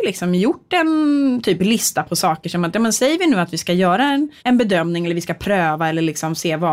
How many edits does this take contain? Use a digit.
1